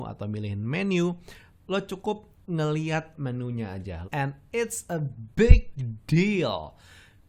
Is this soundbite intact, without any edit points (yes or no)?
no